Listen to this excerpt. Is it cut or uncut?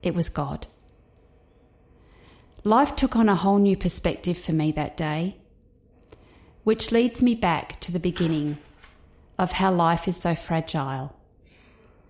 cut